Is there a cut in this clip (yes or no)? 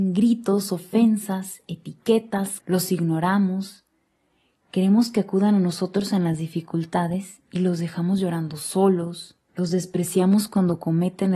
yes